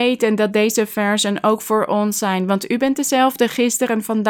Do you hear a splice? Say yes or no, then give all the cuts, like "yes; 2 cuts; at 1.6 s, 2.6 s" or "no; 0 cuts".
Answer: no; 0 cuts